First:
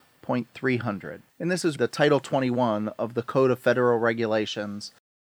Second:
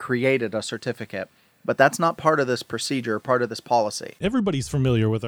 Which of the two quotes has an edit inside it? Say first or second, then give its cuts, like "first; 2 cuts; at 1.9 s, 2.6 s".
first; 1 cut; at 1.8 s